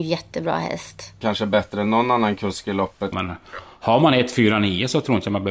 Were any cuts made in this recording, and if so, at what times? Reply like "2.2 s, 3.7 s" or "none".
1.2 s, 3.1 s